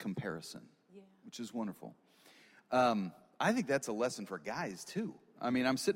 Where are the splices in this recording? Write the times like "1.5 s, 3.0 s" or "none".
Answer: none